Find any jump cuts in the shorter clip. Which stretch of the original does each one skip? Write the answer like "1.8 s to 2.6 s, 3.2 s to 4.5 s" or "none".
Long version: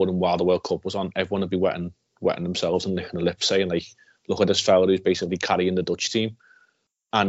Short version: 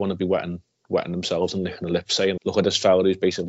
3.7 s to 4.2 s

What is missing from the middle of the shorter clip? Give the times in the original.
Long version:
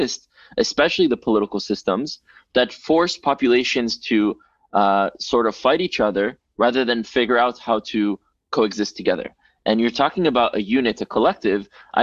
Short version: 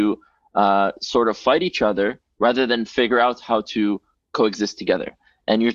none

